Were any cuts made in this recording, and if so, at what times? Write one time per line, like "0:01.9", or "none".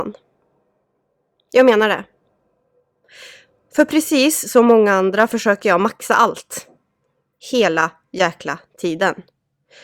none

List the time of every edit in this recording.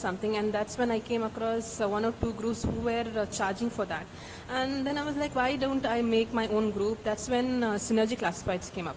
none

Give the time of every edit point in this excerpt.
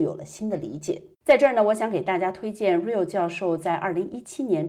0:01.1

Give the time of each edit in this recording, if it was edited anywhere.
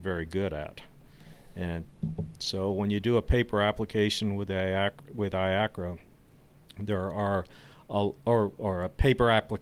none

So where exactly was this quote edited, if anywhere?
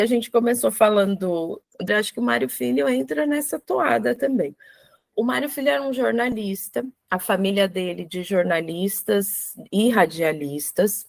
0:01.9

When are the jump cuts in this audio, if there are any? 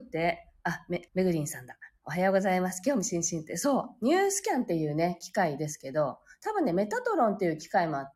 0:01.1

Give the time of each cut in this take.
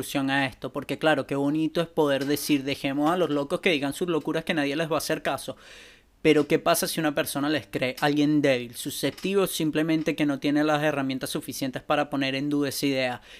none

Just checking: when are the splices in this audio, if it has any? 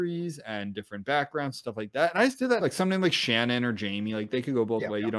0:02.6

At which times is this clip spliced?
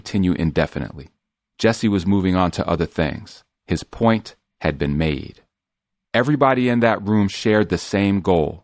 0:06.0

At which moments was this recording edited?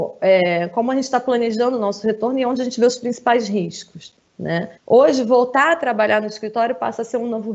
0:04.8

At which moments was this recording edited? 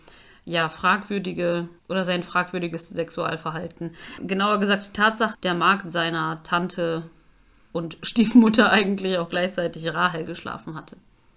0:01.8
0:04.2
0:05.3

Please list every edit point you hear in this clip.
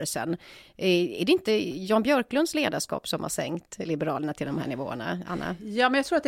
none

